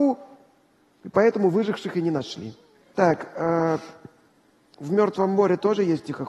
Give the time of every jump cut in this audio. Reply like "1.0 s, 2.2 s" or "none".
2.8 s

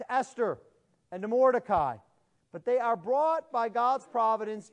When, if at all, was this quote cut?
2.4 s

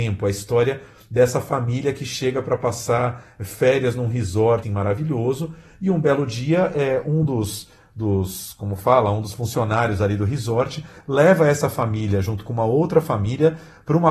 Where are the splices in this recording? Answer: 4.6 s

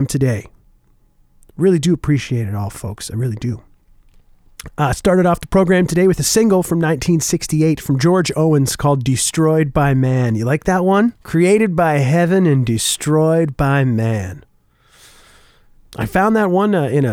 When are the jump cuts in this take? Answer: 11.2 s, 15.9 s

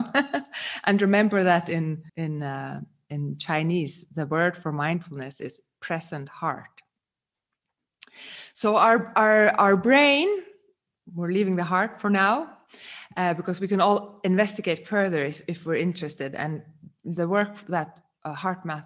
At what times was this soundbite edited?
2.1 s

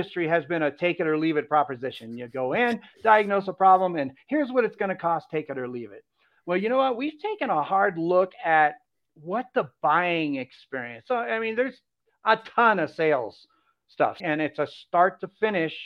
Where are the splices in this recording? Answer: 14.2 s

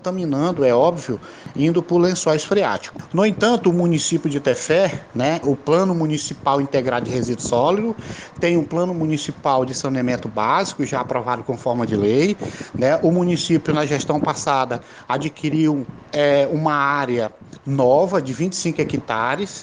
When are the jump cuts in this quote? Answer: 5.4 s

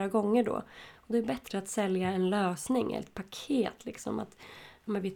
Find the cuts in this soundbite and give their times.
none

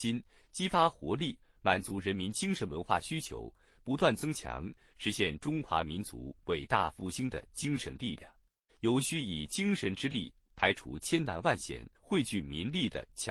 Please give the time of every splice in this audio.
8.7 s, 11.9 s

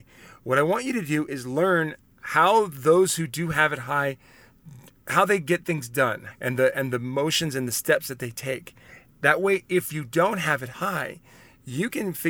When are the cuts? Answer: 6.3 s

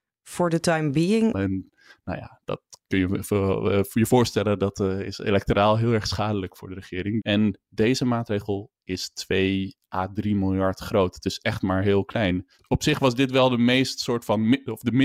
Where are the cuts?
1.3 s, 7.2 s

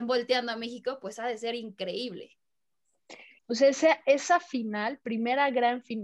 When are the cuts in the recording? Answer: 3.4 s

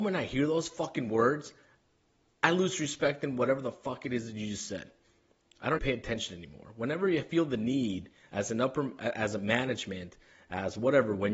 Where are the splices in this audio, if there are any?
5.8 s

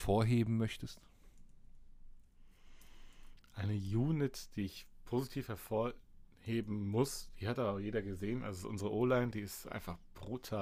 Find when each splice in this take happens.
none

